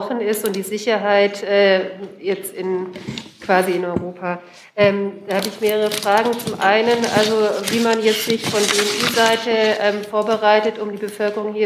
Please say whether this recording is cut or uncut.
uncut